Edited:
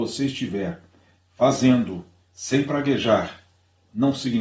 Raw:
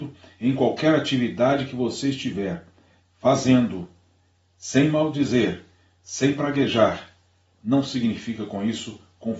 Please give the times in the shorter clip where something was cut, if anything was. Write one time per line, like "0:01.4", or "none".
0:02.2